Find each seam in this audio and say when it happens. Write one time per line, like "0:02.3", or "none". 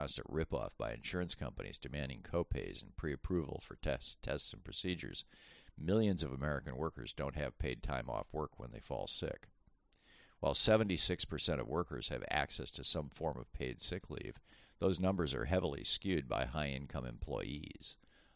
none